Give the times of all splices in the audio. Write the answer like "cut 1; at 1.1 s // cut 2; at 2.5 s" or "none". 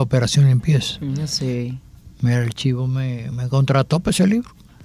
cut 1; at 3.3 s